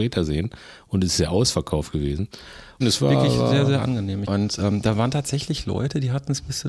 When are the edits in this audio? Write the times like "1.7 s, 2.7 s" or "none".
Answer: 2.8 s, 4.3 s